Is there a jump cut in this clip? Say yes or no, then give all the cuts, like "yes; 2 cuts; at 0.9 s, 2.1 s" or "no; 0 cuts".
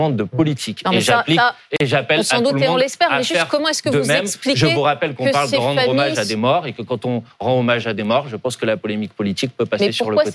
no; 0 cuts